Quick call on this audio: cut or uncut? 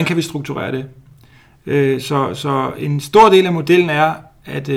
uncut